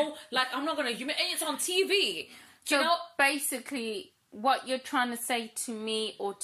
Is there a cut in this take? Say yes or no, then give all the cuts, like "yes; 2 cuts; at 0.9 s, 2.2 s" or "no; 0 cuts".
no; 0 cuts